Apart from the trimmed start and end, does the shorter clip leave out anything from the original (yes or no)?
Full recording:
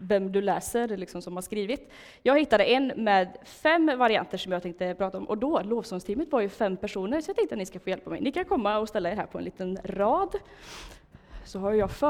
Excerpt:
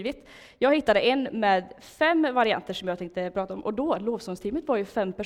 no